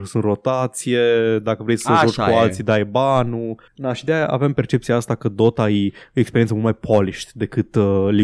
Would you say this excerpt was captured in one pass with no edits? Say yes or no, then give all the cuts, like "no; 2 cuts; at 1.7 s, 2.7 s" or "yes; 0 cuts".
yes; 0 cuts